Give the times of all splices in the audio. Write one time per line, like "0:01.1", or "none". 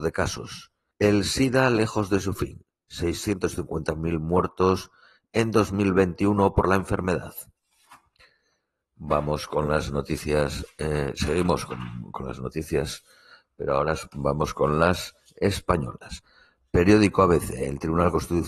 0:00.9

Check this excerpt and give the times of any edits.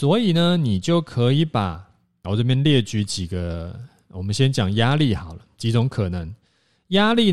0:02.2

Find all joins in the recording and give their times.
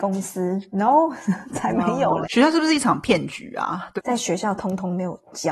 0:02.2
0:04.0

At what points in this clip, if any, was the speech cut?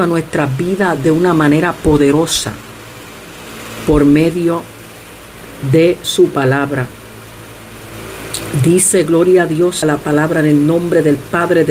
0:09.8

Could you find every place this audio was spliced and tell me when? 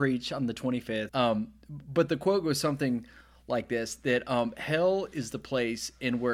0:01.1

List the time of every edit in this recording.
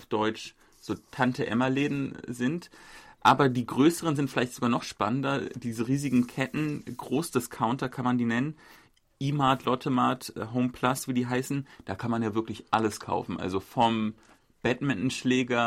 none

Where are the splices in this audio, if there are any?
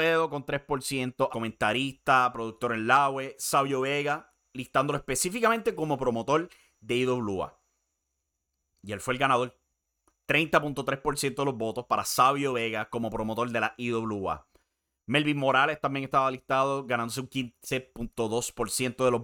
0:01.3

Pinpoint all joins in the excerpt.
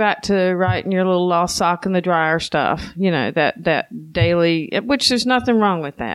none

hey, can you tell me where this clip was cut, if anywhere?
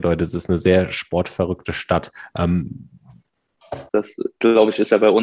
0:03.9

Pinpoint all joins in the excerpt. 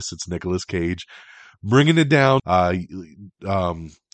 0:02.4

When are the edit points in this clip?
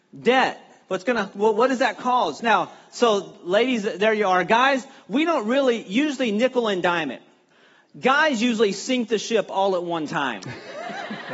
0:02.4

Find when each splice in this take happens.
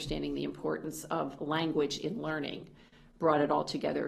none

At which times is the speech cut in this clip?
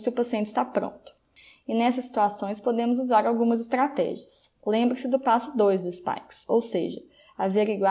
0:01.6

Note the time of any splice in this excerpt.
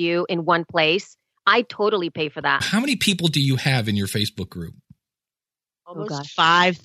0:02.6

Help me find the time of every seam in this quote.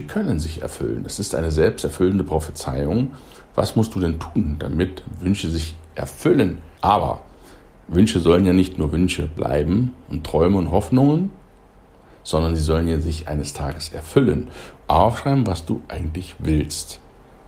0:06.8
0:14.8

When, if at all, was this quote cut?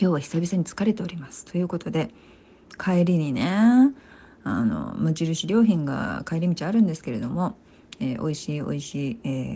none

